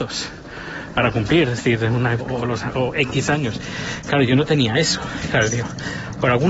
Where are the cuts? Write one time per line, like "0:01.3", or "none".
0:00.9
0:02.2